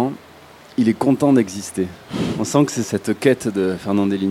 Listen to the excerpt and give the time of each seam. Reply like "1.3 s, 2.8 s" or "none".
2.8 s